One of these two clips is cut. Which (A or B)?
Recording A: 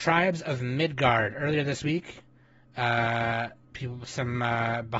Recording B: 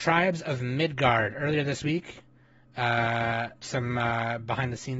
B